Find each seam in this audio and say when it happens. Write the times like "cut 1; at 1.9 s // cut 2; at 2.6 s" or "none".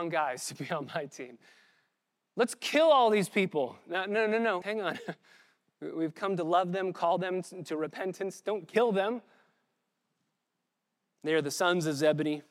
cut 1; at 4.6 s